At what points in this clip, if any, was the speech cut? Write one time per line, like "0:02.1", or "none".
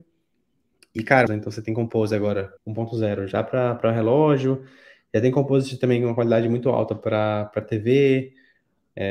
0:01.3
0:02.6